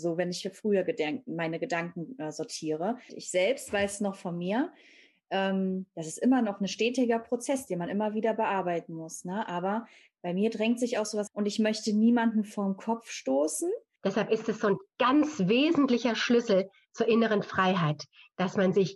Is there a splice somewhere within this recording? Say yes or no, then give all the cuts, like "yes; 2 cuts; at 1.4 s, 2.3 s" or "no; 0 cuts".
yes; 3 cuts; at 3.1 s, 11.3 s, 14.0 s